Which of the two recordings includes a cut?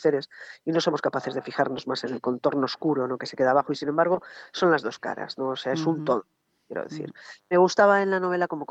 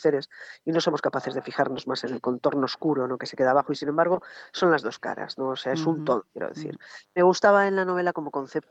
second; 1 cut; at 6.3 s

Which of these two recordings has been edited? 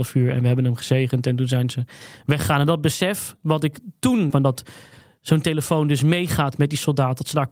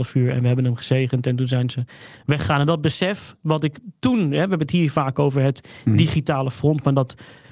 first; 1 cut; at 4.3 s

